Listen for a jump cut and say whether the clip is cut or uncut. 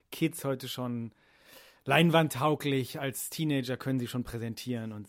uncut